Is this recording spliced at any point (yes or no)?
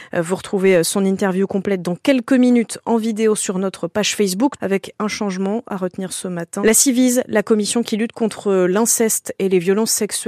yes